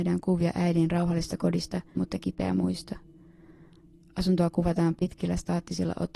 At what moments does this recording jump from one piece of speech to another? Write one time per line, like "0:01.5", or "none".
0:02.0